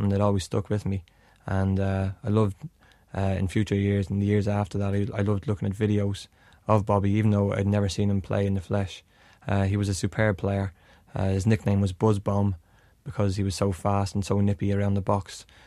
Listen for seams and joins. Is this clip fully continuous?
yes; 0 cuts

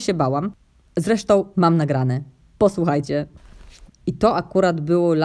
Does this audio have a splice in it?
yes; 2 cuts; at 1.5 s, 3.9 s

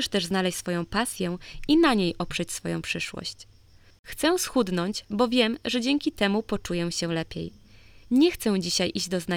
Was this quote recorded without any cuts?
no; 1 cut; at 3.9 s

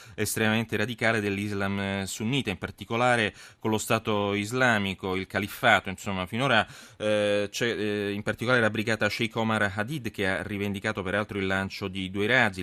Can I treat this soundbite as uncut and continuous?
yes; 0 cuts

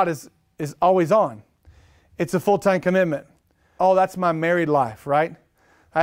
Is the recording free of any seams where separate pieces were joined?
no; 1 cut; at 3.8 s

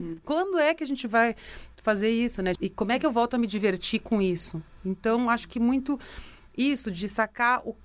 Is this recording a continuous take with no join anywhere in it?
no; 1 cut; at 2.6 s

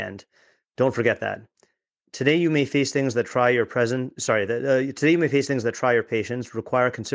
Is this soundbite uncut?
yes; 0 cuts

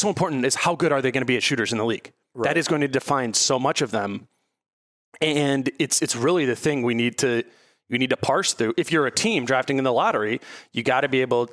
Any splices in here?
no; 0 cuts

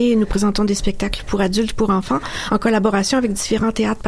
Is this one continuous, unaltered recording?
yes; 0 cuts

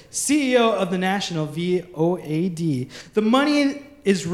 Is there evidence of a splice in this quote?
no; 0 cuts

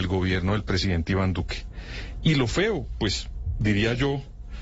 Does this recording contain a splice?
no; 0 cuts

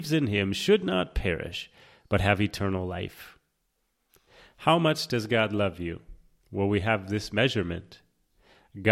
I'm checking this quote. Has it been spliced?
yes; 1 cut; at 6.4 s

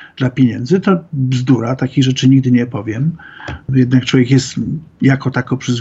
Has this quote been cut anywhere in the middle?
no; 0 cuts

